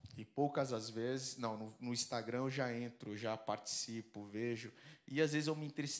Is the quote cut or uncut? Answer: uncut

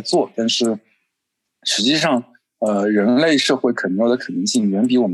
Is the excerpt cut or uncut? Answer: uncut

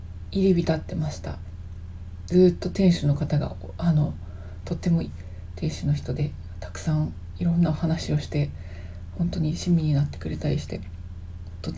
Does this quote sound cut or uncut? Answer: cut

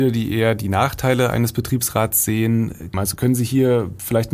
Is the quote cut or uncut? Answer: cut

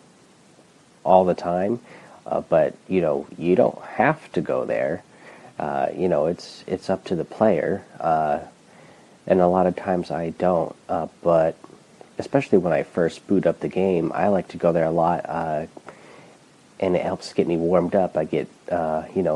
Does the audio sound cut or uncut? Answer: uncut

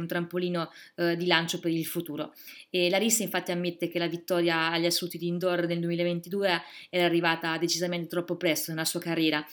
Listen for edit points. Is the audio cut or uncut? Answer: uncut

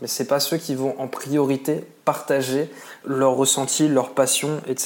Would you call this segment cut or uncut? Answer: cut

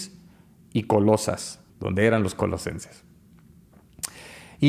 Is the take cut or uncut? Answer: cut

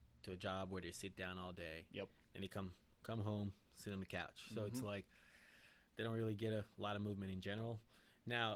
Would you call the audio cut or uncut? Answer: uncut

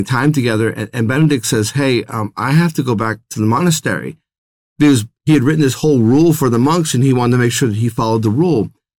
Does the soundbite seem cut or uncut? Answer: uncut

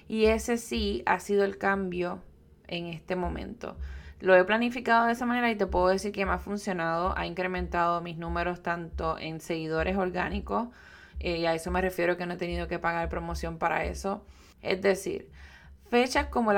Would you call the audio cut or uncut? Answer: cut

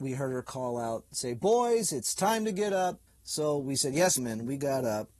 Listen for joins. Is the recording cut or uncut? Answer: cut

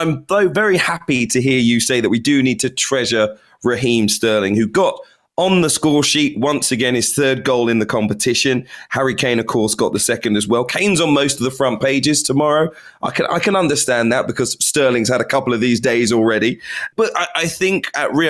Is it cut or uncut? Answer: uncut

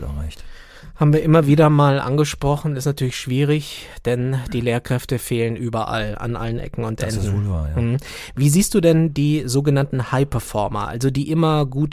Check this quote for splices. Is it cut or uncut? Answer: uncut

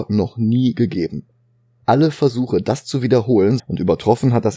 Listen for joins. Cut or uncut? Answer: cut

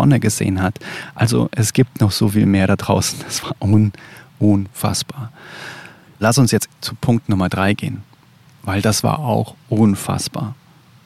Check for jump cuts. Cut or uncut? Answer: uncut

